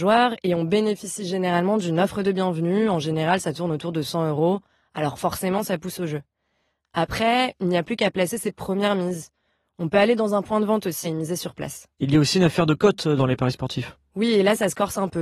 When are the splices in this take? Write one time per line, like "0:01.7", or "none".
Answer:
0:11.0